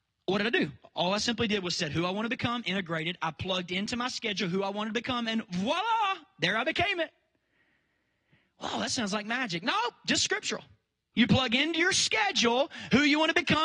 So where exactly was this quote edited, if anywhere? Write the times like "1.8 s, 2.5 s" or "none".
11.1 s